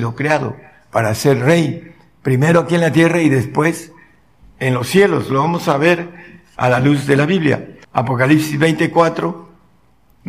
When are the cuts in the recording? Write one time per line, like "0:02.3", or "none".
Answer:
0:07.8